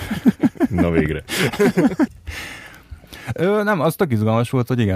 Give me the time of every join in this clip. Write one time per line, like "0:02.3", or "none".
0:02.1